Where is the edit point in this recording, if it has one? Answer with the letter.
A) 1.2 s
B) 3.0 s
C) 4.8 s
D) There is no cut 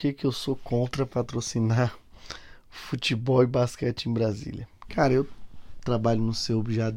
D